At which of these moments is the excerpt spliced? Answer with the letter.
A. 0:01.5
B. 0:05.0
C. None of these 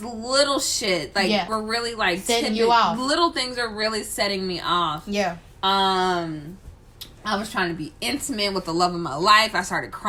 A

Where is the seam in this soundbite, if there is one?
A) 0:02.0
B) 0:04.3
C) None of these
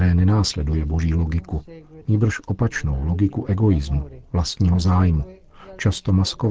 A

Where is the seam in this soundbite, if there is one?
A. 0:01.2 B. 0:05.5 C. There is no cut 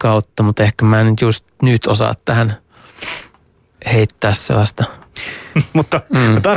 B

